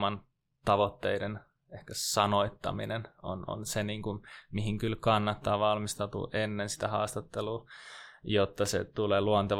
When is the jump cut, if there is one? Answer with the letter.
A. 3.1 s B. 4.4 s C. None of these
C